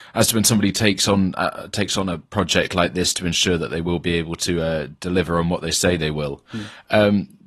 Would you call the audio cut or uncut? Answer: uncut